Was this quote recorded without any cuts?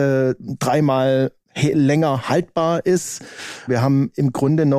no; 2 cuts; at 1.4 s, 3.7 s

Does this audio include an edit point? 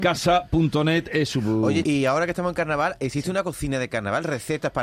yes; 1 cut; at 1.8 s

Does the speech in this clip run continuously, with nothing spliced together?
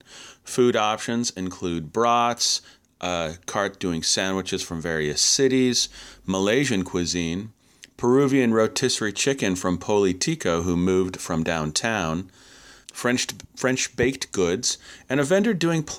no; 1 cut; at 12.8 s

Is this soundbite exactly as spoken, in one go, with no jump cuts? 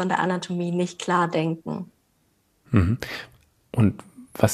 yes; 0 cuts

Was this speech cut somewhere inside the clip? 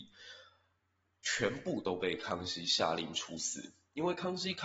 no; 0 cuts

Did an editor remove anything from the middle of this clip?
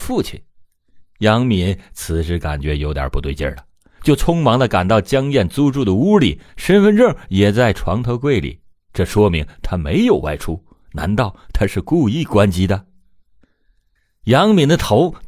yes; 2 cuts; at 6.5 s, 13.4 s

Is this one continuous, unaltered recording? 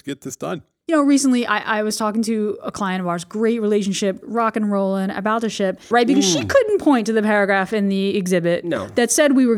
no; 2 cuts; at 4.2 s, 5.9 s

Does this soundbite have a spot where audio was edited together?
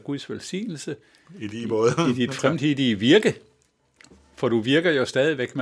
no; 0 cuts

